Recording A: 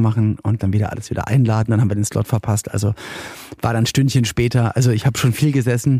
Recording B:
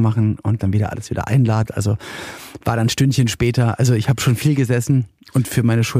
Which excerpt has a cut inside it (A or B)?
B